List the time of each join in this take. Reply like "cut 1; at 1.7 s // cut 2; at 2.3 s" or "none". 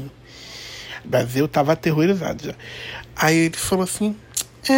cut 1; at 1.0 s

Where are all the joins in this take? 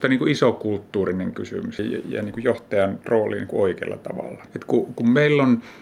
cut 1; at 1.8 s // cut 2; at 4.5 s

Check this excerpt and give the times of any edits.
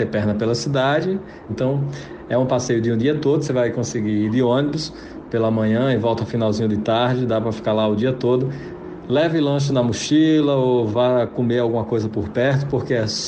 cut 1; at 1.5 s

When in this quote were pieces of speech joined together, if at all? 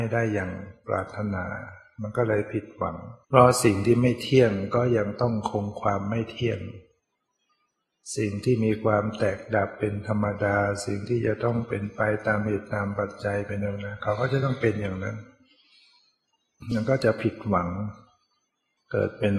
cut 1; at 3.2 s

